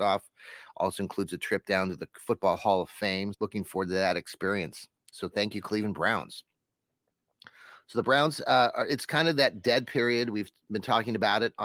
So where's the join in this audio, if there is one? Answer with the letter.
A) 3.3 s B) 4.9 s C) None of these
A